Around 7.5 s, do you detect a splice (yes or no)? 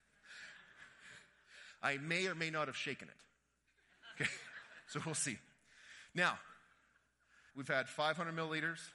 yes